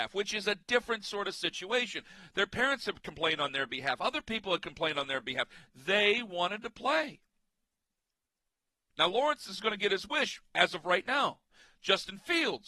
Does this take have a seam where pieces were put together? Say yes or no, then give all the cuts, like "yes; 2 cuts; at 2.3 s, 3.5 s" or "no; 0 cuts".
no; 0 cuts